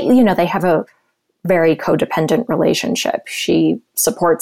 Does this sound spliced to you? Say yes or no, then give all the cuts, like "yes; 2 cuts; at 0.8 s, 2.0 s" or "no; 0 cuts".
no; 0 cuts